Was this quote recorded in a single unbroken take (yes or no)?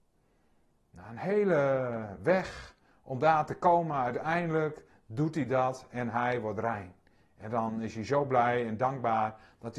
yes